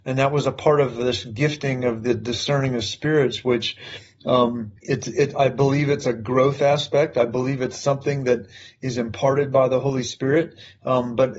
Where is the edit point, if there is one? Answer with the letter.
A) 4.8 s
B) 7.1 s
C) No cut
A